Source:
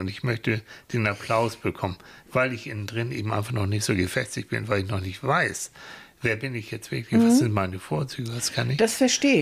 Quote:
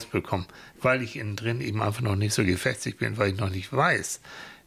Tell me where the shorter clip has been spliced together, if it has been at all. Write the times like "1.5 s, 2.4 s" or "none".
none

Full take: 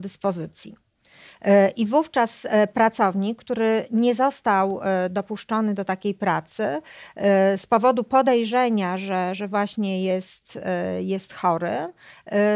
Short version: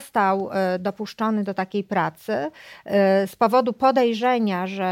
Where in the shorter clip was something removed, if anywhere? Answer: none

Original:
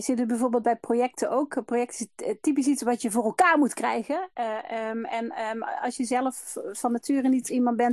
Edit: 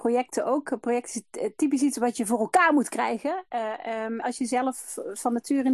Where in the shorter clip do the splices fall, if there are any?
4.2 s

